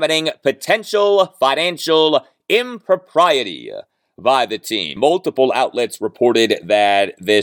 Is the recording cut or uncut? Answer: cut